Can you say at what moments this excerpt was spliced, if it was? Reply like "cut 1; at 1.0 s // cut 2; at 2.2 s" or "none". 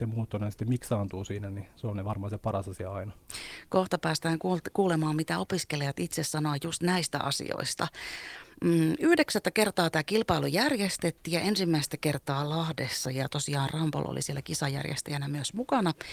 none